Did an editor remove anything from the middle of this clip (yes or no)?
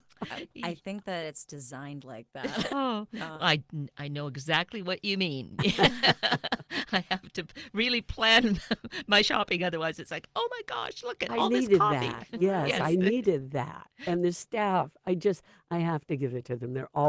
yes